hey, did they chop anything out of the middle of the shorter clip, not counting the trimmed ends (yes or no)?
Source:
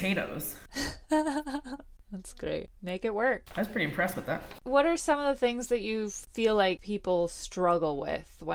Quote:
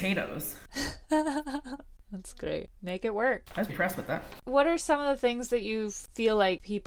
yes